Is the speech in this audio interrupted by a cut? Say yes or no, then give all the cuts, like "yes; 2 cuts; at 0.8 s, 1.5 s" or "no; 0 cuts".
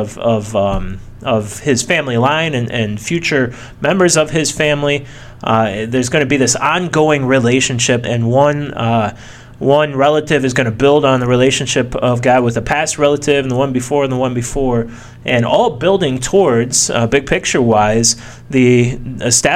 yes; 1 cut; at 8.0 s